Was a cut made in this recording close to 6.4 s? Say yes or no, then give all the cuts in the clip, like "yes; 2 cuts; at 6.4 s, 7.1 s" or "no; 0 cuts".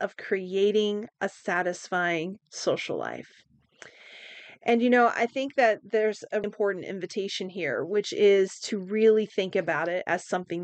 yes; 1 cut; at 6.4 s